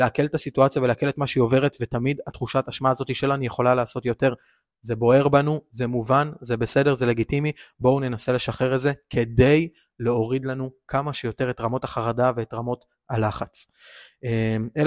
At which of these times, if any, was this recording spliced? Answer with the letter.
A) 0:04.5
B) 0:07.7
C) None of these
C